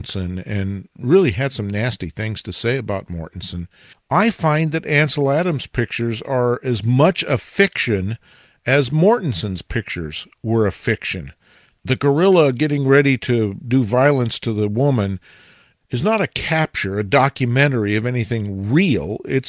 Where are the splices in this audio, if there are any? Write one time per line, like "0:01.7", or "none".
0:03.9